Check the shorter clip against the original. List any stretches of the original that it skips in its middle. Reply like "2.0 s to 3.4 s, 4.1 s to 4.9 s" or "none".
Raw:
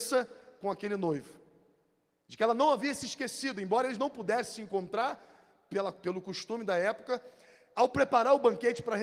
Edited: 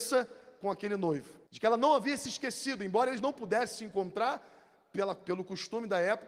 1.5 s to 2.2 s